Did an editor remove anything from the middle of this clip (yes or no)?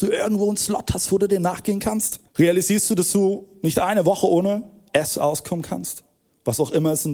yes